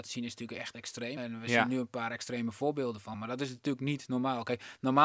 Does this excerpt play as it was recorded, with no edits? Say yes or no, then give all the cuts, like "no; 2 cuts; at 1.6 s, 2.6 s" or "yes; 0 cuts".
no; 2 cuts; at 1.2 s, 3.1 s